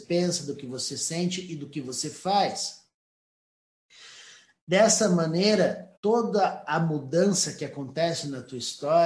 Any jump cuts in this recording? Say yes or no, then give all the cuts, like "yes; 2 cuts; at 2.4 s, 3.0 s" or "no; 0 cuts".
yes; 1 cut; at 6.0 s